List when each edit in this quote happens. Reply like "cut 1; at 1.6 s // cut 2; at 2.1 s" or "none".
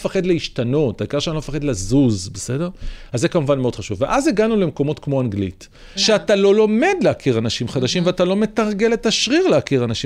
cut 1; at 6.0 s

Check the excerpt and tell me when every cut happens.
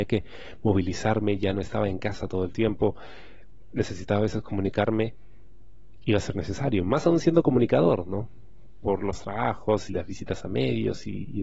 cut 1; at 9.9 s

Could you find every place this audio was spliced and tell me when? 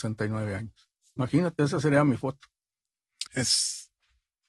cut 1; at 3.3 s

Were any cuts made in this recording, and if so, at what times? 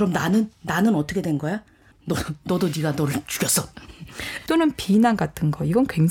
cut 1; at 1.9 s // cut 2; at 4.5 s

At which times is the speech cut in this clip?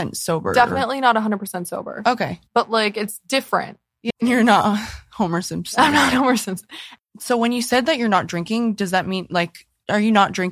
cut 1; at 4.1 s // cut 2; at 7.0 s

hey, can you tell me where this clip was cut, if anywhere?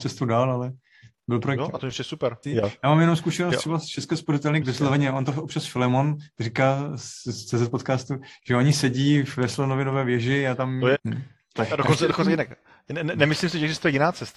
cut 1; at 2.4 s // cut 2; at 4.6 s // cut 3; at 10.9 s

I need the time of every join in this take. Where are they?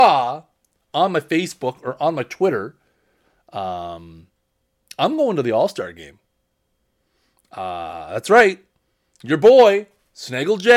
none

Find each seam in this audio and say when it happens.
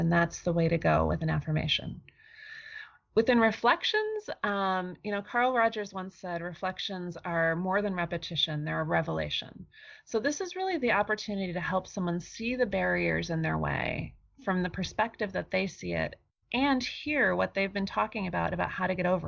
none

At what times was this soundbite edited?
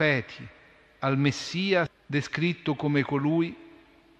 cut 1; at 1.9 s

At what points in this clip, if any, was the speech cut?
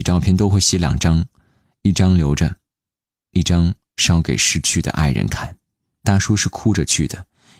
cut 1; at 6.0 s

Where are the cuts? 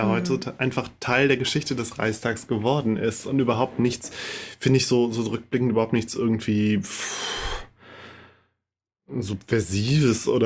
none

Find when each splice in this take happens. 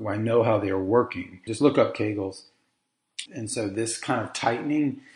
cut 1; at 1.5 s // cut 2; at 3.3 s

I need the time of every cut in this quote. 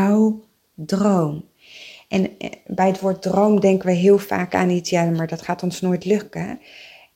none

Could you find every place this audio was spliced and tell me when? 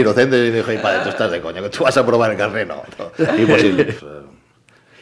cut 1; at 4.0 s

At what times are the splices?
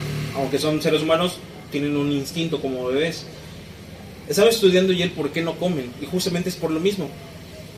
none

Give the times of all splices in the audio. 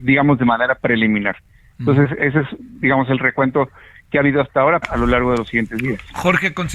cut 1; at 4.8 s

